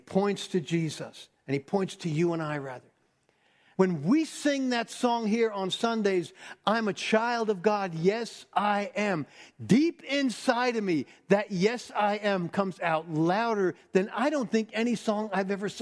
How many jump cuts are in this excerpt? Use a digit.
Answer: 1